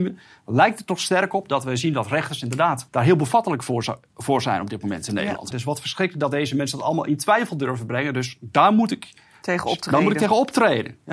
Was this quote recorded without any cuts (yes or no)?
no